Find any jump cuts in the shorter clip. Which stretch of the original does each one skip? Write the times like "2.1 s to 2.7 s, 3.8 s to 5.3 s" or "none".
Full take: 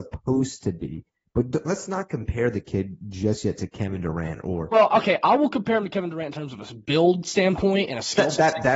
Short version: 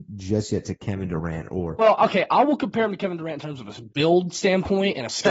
none